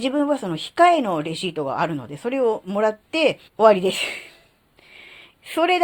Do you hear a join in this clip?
yes; 1 cut; at 3.5 s

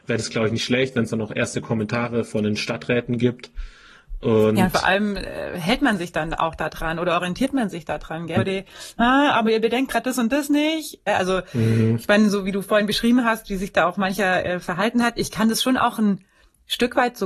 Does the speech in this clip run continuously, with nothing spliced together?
no; 2 cuts; at 8.4 s, 11.1 s

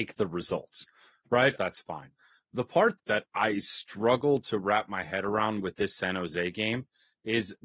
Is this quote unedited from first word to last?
no; 2 cuts; at 1.6 s, 3.0 s

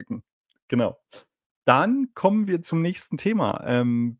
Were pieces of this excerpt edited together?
no; 0 cuts

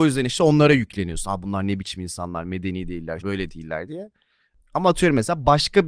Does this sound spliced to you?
yes; 1 cut; at 3.2 s

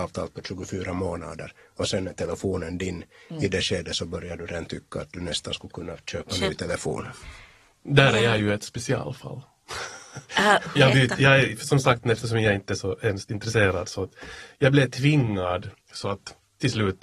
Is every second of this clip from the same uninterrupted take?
no; 2 cuts; at 10.8 s, 15.7 s

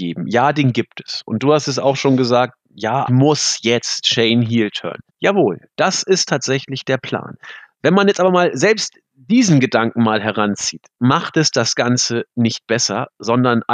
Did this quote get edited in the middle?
yes; 2 cuts; at 3.1 s, 5.1 s

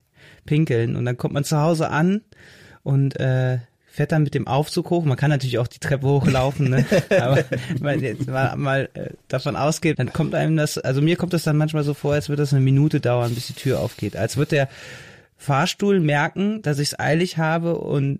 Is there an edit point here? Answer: yes; 1 cut; at 9.9 s

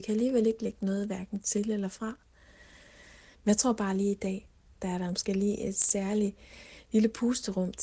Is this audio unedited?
no; 1 cut; at 3.3 s

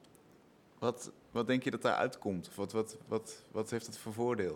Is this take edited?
yes; 1 cut; at 1.2 s

